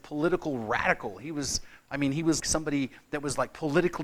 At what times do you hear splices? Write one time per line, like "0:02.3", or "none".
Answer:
0:02.4